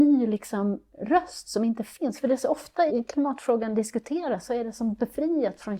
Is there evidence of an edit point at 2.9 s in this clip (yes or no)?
yes